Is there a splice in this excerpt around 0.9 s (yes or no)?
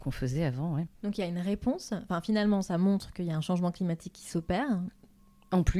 yes